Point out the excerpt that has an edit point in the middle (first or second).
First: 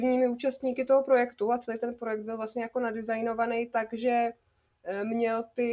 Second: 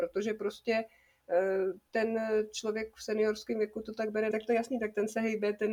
second